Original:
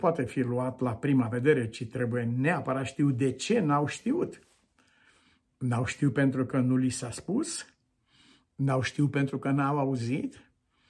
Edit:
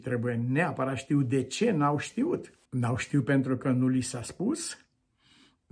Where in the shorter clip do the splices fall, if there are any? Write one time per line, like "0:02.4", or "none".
0:02.7